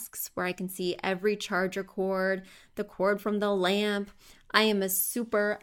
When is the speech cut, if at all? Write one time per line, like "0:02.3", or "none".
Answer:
none